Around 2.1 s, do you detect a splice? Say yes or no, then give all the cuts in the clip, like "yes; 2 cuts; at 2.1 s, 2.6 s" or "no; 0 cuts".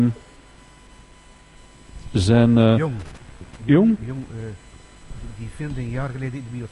no; 1 cut; at 4.3 s